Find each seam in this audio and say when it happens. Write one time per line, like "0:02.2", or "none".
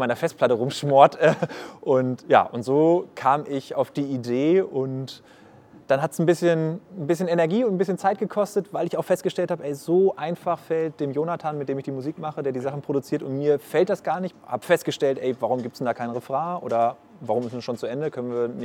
0:14.3